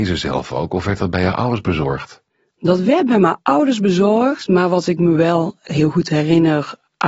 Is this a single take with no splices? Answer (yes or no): yes